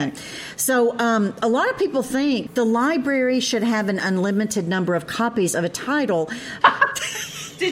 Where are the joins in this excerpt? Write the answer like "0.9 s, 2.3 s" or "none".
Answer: 2.5 s, 6.6 s